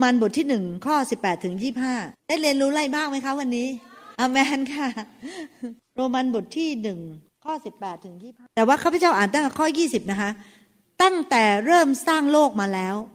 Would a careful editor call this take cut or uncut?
cut